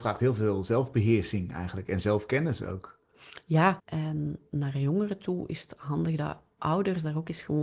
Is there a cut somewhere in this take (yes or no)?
yes